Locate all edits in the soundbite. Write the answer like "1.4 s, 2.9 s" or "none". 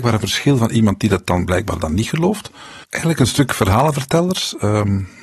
2.8 s